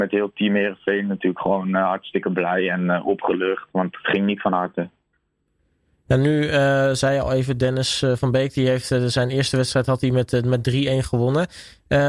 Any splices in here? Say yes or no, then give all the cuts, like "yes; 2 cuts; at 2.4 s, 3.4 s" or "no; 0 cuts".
no; 0 cuts